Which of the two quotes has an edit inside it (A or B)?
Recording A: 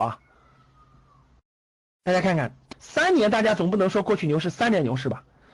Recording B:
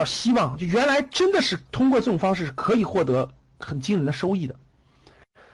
A